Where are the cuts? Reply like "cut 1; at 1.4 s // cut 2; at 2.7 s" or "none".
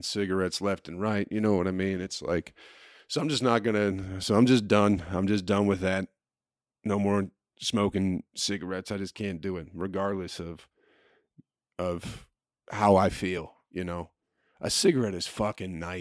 none